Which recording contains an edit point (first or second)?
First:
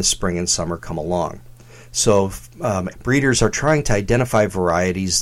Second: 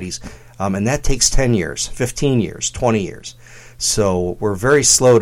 first